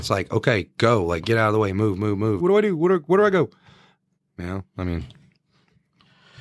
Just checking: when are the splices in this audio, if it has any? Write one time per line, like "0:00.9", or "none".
0:02.4